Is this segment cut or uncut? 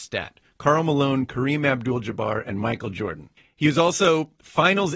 uncut